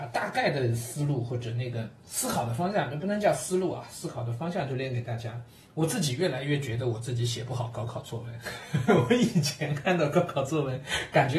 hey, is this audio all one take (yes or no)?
yes